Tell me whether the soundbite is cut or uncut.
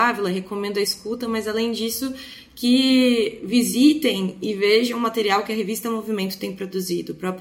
uncut